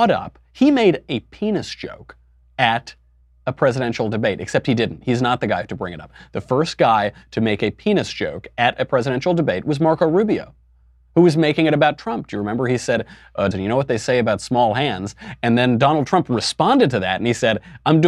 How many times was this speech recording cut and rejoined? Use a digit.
1